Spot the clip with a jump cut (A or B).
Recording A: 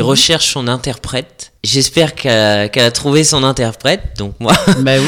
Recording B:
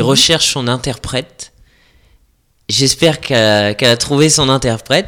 A